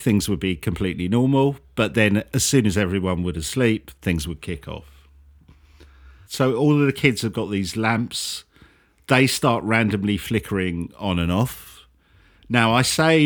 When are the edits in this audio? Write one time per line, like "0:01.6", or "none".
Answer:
0:06.3